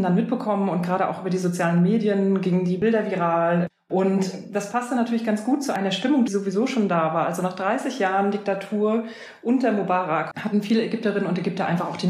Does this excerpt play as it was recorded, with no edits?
no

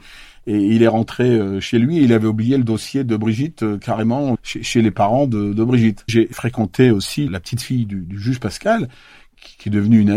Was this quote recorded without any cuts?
no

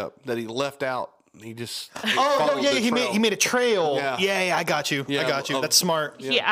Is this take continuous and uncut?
yes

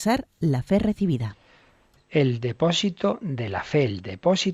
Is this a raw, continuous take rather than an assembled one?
yes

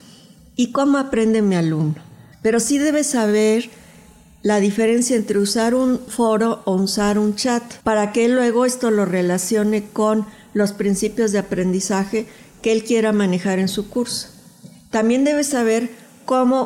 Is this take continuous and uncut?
no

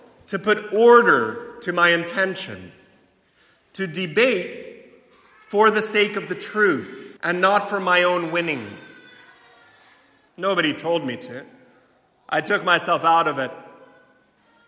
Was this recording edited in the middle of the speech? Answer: yes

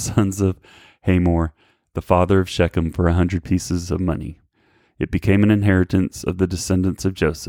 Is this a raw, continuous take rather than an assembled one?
yes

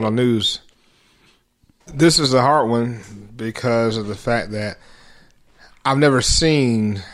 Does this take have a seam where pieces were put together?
yes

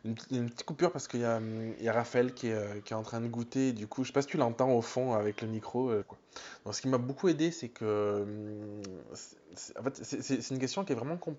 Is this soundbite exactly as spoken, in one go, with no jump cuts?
no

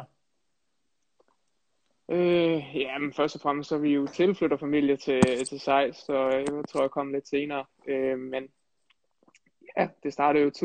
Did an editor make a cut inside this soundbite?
no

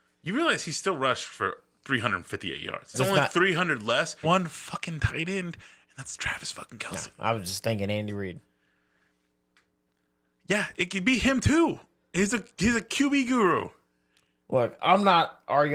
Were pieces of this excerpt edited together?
yes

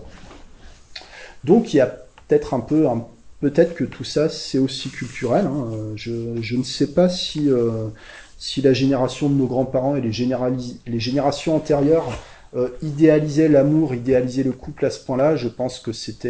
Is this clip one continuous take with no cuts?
yes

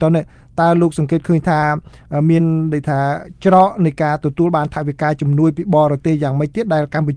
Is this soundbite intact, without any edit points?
yes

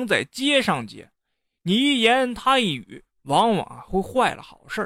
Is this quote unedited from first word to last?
no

